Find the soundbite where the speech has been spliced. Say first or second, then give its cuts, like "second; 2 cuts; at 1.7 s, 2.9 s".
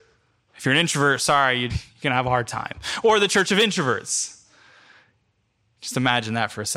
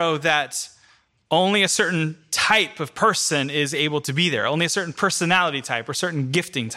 first; 1 cut; at 1.7 s